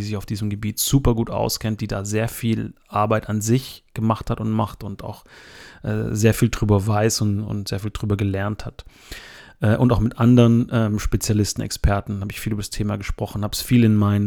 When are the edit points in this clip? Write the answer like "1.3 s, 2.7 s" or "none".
none